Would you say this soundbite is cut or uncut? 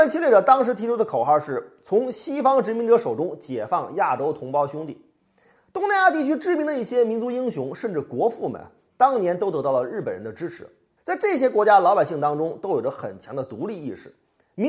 cut